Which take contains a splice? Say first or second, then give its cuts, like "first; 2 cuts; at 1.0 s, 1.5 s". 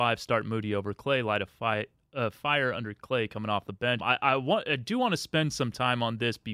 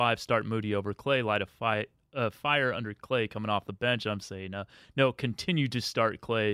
first; 1 cut; at 4.0 s